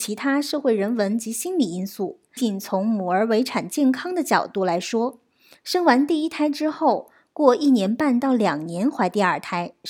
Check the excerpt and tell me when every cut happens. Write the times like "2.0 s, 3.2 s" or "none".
2.4 s

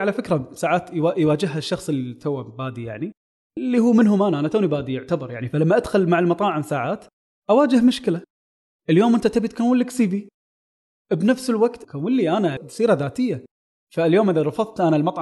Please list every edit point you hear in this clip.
none

